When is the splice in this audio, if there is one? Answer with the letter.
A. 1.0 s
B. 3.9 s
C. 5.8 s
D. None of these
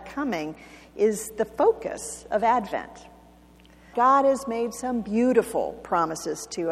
B